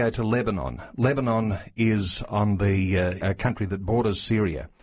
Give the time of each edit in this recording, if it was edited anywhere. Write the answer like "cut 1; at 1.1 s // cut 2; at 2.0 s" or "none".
cut 1; at 3.2 s